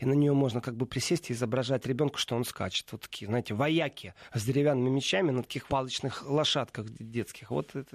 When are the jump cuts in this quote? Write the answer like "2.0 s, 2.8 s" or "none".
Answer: 5.7 s